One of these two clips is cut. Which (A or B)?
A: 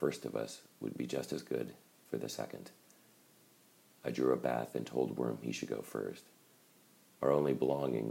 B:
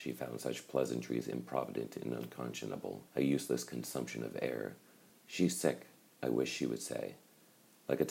B